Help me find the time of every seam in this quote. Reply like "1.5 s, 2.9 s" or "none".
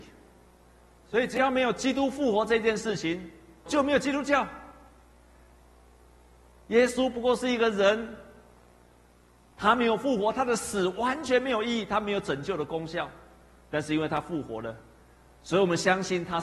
3.7 s